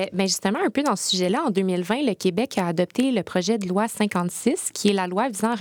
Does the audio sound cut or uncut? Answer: uncut